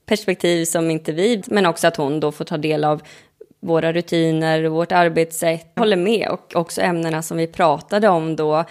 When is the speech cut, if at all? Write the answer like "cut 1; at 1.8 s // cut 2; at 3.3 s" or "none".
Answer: cut 1; at 1.4 s // cut 2; at 5.8 s